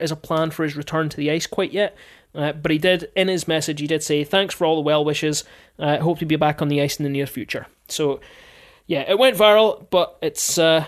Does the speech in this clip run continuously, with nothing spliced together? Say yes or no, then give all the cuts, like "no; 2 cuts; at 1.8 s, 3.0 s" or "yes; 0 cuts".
yes; 0 cuts